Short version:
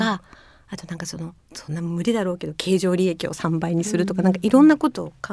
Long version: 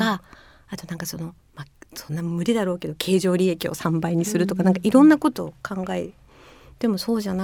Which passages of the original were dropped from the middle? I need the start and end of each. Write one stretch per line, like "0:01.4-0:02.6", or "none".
0:01.5-0:01.9